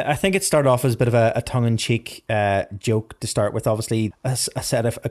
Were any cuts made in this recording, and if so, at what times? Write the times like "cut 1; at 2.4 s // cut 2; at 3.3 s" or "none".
cut 1; at 4.1 s